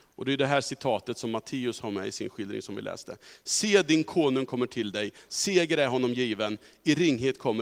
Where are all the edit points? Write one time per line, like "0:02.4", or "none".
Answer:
0:05.3